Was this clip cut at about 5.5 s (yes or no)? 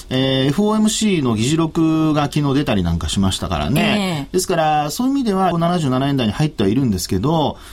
yes